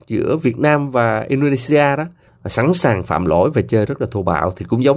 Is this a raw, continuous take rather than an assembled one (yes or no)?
no